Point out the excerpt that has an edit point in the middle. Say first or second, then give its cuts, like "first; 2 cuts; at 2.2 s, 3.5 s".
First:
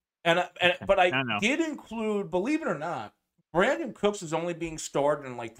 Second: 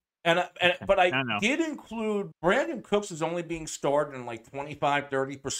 second; 1 cut; at 2.3 s